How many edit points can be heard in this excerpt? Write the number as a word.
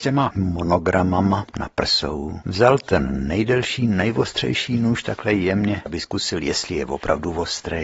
one